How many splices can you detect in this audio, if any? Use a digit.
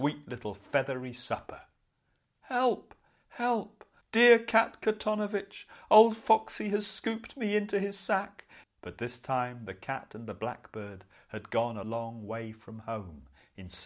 3